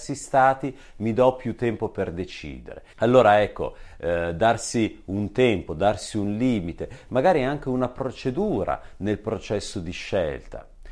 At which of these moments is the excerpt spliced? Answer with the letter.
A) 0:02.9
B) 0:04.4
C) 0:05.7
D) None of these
A